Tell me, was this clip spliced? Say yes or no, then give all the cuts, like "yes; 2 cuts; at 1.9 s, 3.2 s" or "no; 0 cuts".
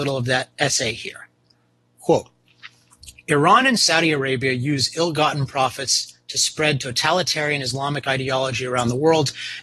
no; 0 cuts